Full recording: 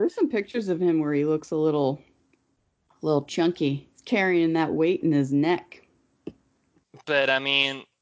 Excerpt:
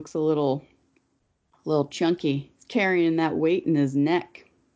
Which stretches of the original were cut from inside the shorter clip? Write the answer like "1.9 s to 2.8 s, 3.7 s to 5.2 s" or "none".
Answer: none